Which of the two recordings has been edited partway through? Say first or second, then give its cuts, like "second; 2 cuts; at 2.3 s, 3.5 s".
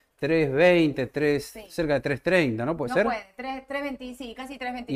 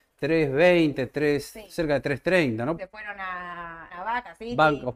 second; 2 cuts; at 2.8 s, 3.9 s